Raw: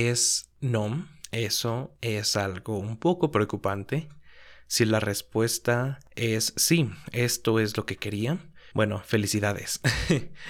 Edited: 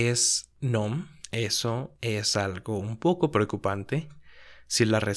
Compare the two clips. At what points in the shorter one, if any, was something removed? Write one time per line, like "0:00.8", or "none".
none